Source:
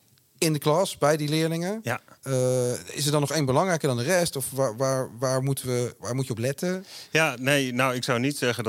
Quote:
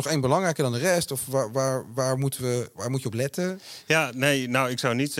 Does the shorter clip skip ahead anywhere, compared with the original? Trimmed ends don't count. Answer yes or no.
no